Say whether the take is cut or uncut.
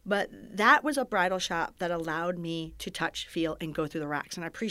uncut